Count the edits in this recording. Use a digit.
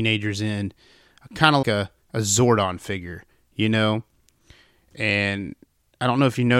1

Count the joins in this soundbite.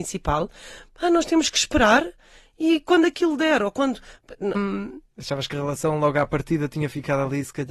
1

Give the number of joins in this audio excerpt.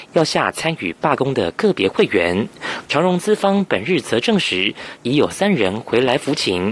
2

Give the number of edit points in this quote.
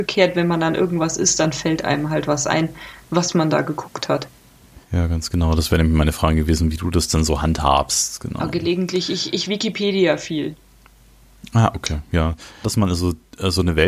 2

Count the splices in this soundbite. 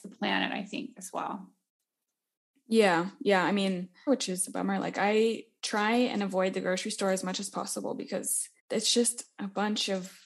2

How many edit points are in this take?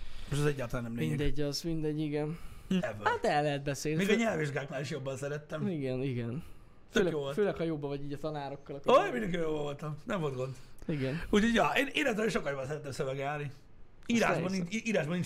1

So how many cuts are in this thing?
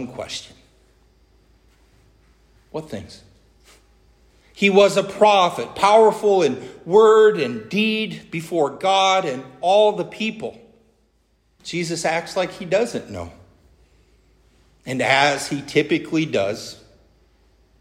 2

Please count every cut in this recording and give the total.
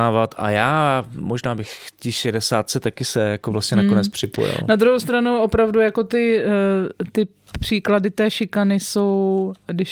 0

